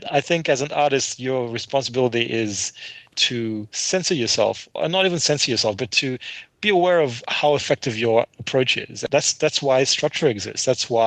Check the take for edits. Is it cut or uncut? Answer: cut